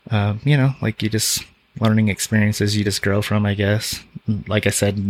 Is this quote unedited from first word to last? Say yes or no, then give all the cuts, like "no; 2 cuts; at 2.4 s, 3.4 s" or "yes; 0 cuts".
yes; 0 cuts